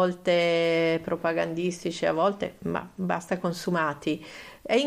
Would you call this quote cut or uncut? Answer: uncut